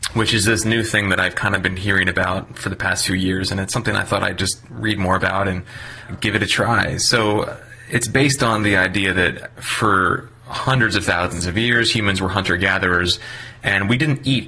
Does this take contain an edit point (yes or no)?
yes